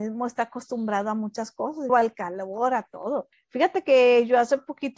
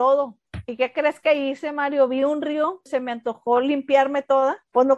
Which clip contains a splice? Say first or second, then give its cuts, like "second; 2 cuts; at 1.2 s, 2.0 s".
first; 1 cut; at 1.9 s